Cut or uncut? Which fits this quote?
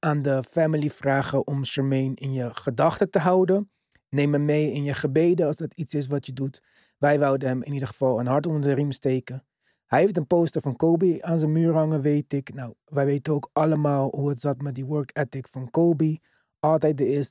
uncut